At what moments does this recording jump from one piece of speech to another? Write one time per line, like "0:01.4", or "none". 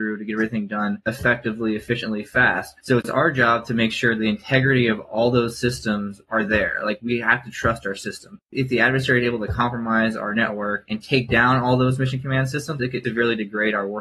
none